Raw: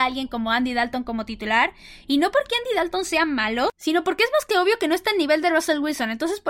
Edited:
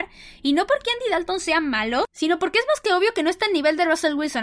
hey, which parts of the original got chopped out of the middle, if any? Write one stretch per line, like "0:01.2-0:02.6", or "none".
none